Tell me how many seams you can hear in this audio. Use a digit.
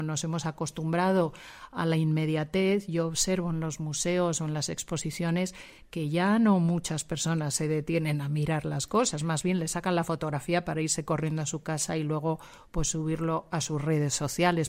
0